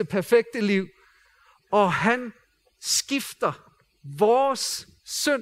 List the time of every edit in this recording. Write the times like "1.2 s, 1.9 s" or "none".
none